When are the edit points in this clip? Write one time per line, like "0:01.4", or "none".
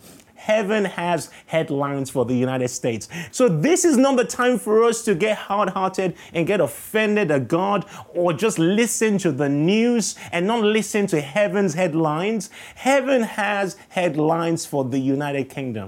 0:03.3